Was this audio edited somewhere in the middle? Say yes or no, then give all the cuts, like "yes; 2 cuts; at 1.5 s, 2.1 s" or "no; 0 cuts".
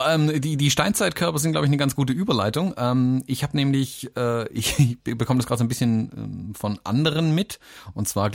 no; 0 cuts